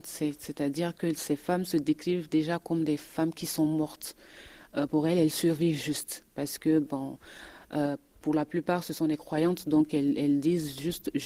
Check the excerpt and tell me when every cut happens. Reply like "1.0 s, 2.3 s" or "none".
none